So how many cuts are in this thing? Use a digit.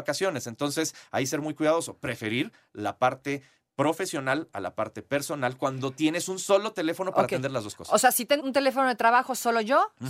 1